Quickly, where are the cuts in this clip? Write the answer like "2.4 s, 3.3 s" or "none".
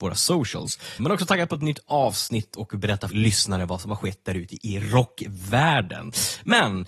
1.0 s, 3.1 s